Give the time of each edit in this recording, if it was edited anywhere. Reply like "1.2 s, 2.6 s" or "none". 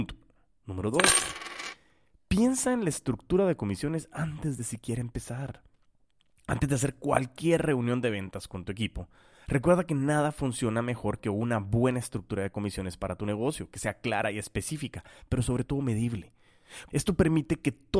16.9 s